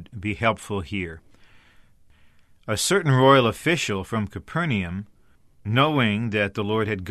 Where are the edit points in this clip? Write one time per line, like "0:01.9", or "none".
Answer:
none